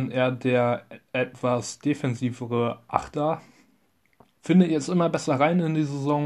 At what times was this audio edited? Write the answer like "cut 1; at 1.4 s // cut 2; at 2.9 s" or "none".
cut 1; at 4.3 s